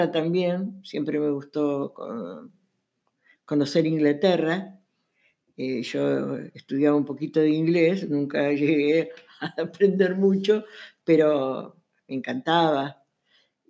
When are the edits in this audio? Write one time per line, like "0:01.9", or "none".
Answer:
none